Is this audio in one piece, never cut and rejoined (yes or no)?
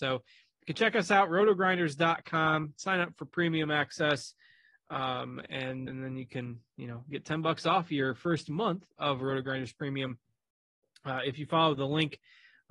no